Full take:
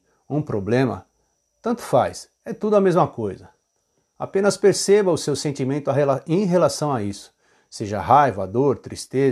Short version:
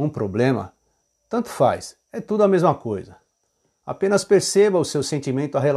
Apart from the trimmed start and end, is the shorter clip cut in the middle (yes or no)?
no